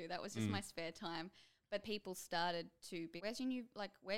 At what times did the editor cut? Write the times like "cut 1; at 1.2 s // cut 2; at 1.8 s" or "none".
cut 1; at 1.8 s // cut 2; at 3.2 s